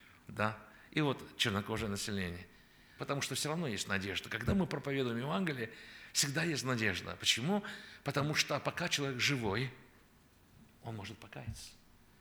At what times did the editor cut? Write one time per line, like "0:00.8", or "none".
0:03.0

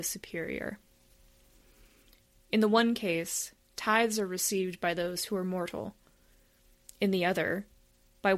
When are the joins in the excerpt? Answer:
none

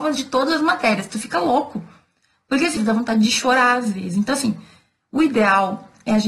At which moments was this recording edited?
0:02.8

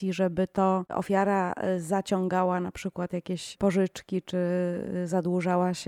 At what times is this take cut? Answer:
none

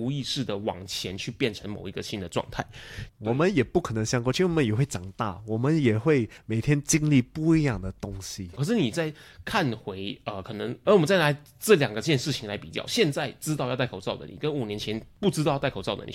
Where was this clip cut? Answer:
0:03.1
0:08.6
0:10.8

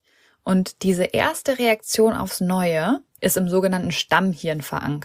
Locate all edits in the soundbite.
0:03.2

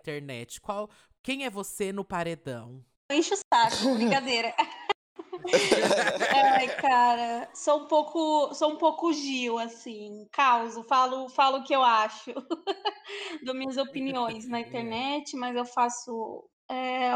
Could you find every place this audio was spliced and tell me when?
none

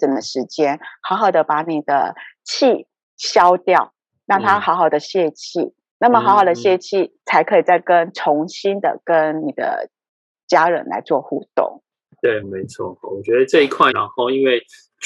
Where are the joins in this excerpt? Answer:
0:07.2
0:12.4
0:13.9

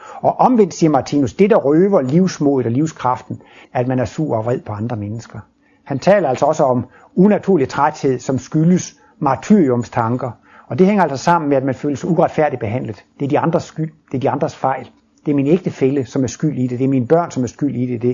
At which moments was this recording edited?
0:03.6

